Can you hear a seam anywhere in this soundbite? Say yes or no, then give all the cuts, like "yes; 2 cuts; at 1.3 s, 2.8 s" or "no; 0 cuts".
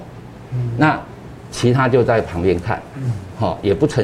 no; 0 cuts